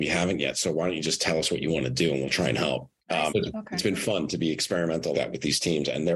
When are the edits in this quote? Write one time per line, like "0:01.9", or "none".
0:03.3
0:05.1